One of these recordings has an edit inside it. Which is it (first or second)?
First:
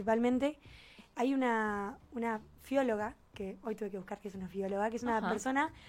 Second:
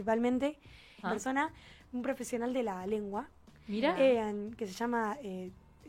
second